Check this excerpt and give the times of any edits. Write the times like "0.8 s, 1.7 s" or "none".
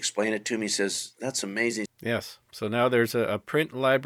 1.9 s